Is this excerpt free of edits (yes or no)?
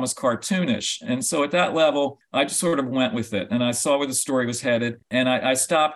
yes